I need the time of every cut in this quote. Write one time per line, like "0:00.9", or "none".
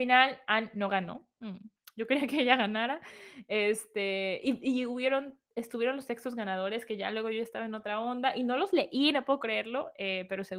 none